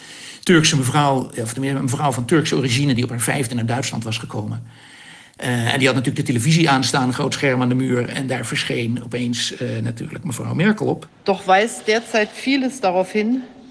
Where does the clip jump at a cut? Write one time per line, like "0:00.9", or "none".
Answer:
0:01.3